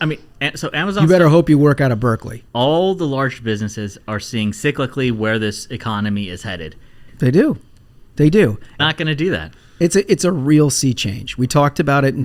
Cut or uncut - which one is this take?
cut